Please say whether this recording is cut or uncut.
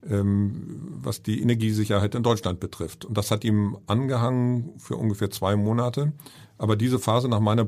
uncut